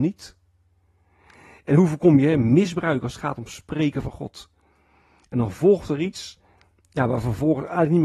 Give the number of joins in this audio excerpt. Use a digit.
1